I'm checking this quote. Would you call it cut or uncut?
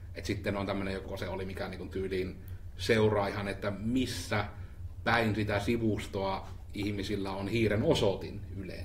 cut